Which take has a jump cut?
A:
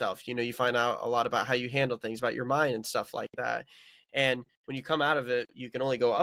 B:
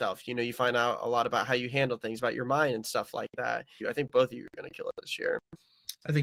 B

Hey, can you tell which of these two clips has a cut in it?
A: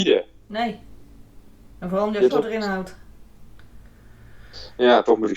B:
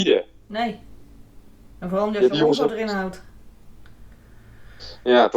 A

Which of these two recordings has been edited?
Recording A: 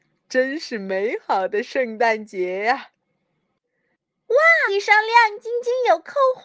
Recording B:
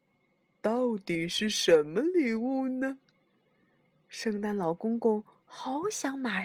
A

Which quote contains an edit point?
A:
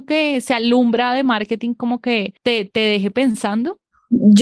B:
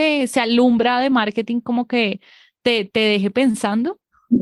A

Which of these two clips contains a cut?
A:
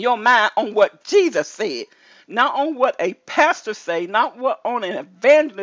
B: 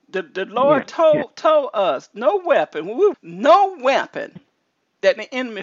B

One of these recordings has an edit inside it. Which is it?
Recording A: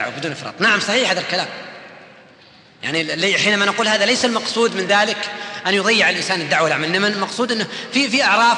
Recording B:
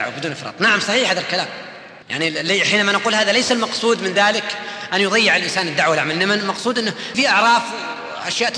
B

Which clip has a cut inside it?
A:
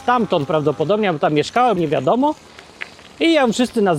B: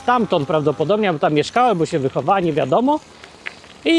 A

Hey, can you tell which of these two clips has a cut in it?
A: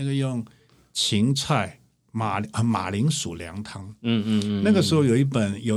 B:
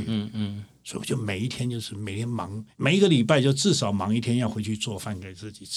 B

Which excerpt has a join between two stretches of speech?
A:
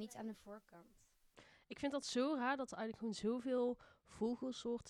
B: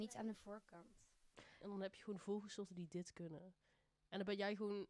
B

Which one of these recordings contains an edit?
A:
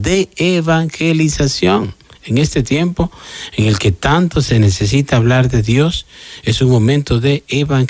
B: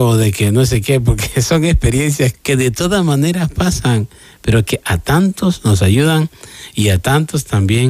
B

